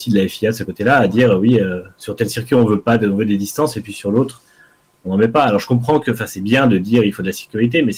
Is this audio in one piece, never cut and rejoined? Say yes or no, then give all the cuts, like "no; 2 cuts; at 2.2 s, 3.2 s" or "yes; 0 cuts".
yes; 0 cuts